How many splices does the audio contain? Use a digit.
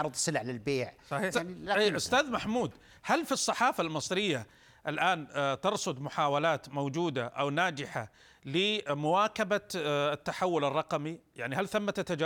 1